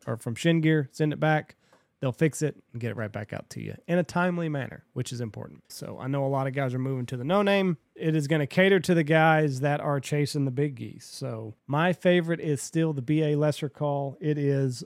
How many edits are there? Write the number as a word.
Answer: three